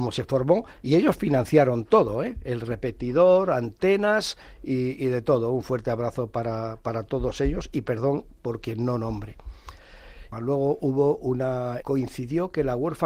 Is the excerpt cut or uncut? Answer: cut